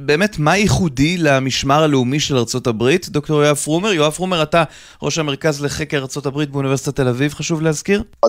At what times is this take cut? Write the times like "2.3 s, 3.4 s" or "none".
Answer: none